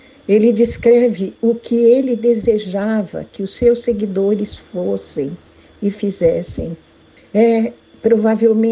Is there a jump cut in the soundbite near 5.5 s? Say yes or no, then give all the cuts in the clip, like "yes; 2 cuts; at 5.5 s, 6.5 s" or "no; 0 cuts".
no; 1 cut; at 7.2 s